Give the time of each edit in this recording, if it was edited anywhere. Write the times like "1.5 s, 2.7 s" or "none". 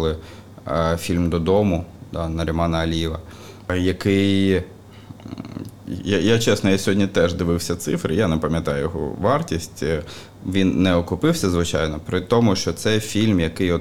none